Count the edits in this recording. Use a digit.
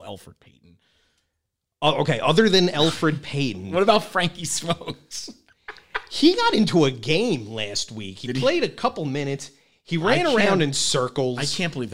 0